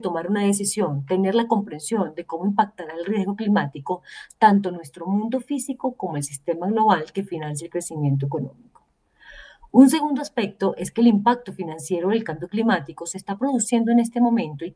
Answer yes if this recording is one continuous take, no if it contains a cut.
yes